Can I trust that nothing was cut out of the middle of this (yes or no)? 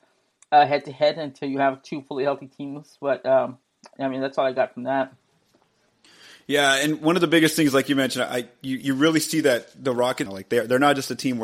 no